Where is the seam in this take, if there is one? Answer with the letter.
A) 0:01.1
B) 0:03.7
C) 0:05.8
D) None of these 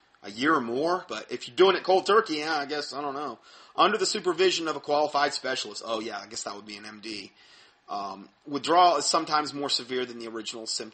A